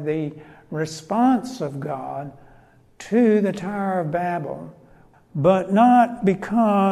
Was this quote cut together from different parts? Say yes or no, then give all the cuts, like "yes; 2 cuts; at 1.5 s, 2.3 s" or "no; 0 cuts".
yes; 1 cut; at 5.1 s